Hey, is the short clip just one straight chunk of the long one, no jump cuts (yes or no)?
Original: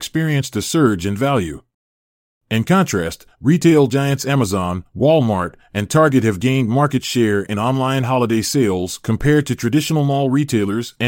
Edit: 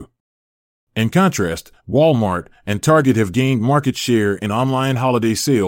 no